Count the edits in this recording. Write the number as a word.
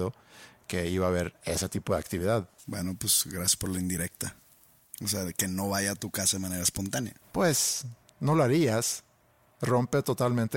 zero